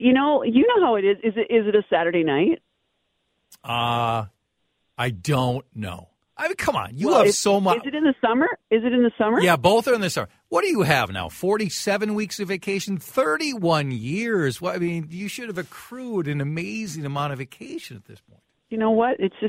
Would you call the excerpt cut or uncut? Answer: uncut